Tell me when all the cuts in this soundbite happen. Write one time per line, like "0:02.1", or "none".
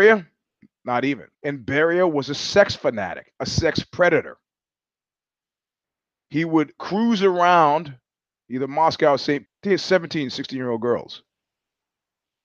0:01.3
0:09.5

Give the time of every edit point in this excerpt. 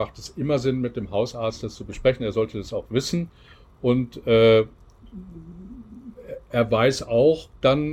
none

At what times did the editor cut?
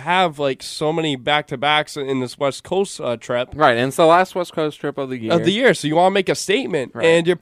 none

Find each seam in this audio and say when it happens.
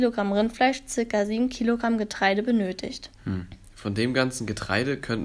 0:03.1

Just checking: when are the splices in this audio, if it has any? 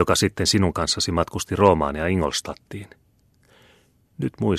none

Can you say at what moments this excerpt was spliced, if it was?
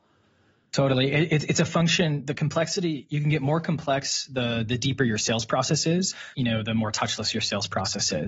0:06.3

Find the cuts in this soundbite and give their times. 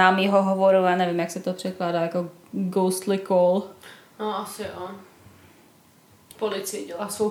0:06.3

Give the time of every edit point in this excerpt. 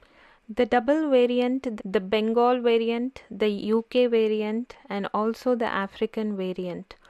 0:01.8

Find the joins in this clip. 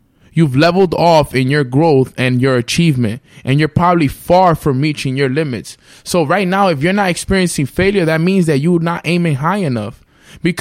none

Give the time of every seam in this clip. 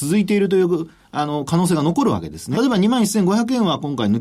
0:02.5

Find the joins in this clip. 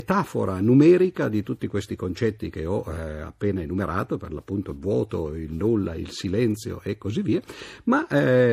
none

